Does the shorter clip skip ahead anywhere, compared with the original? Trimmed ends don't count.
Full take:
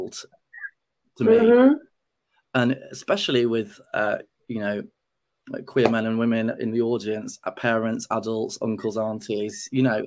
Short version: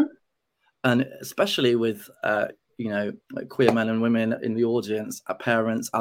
yes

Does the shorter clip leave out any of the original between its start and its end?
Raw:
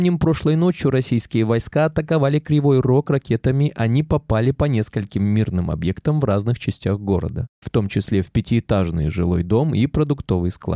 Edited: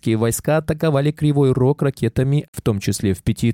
yes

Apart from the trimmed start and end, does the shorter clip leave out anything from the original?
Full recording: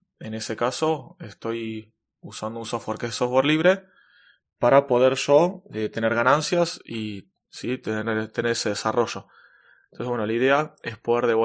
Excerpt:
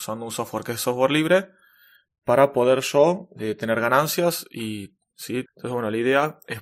yes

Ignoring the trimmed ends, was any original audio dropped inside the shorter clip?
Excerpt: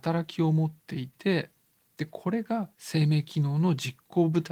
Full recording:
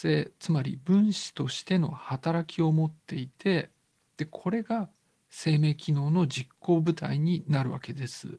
yes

